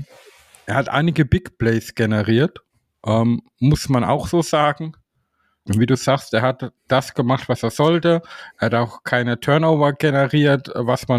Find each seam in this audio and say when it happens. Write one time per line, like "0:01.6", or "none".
0:05.7